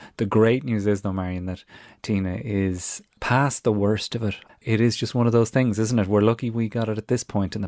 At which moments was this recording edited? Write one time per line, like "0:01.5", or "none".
0:04.5